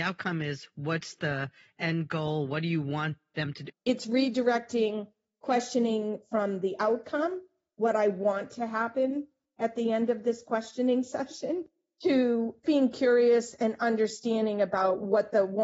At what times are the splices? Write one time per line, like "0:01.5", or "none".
0:03.7
0:12.6